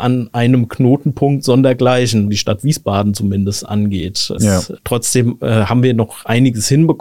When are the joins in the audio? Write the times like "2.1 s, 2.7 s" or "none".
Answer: 2.3 s, 4.4 s